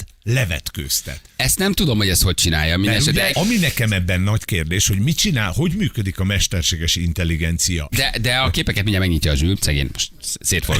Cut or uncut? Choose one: cut